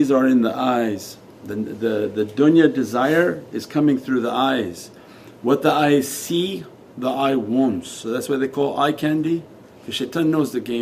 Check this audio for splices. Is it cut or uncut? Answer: uncut